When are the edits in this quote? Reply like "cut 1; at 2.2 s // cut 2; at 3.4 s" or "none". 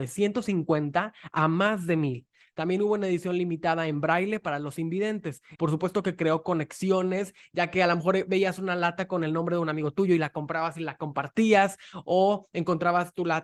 cut 1; at 5.6 s